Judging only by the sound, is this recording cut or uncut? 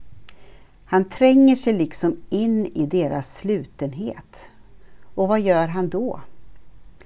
uncut